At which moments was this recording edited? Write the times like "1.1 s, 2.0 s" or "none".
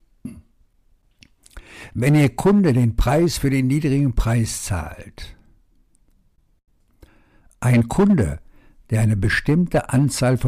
none